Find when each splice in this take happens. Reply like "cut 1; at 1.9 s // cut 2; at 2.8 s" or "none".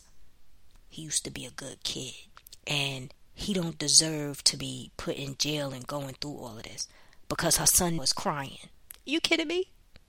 cut 1; at 8.0 s